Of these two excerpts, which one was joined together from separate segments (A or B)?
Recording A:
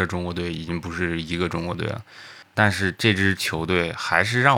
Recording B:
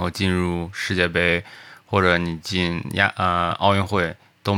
A